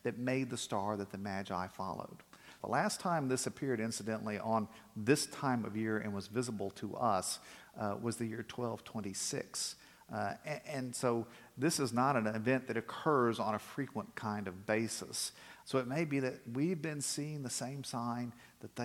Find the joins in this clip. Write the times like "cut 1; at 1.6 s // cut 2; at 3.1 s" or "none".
cut 1; at 2.6 s // cut 2; at 15.6 s